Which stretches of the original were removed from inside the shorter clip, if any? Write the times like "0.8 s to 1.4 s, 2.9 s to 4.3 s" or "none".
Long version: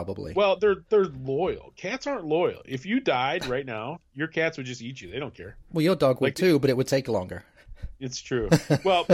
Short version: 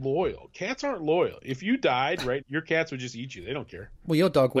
3.6 s to 4.1 s